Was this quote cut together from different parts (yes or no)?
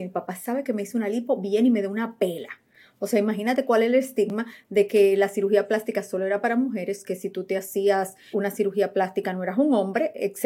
yes